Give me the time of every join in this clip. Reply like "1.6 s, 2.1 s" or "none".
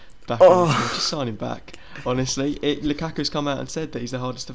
none